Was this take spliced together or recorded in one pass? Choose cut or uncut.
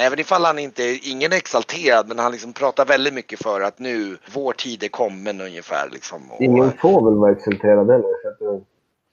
cut